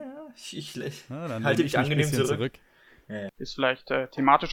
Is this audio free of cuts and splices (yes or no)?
no